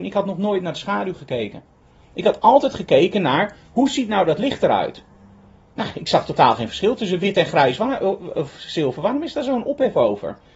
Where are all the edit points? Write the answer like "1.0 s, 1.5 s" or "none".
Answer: none